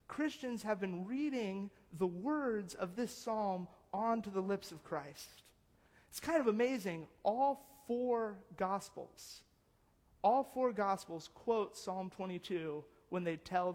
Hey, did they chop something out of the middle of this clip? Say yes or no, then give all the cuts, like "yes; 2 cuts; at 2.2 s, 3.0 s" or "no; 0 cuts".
no; 0 cuts